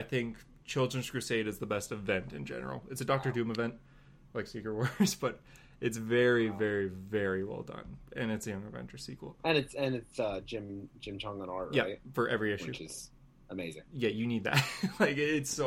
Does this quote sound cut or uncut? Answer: uncut